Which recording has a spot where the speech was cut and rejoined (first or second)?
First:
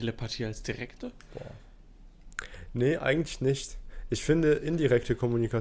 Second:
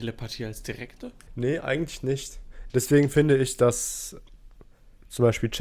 second